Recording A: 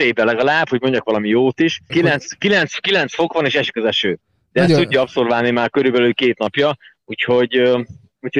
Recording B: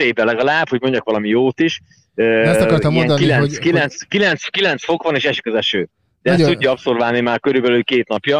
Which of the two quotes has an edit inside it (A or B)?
A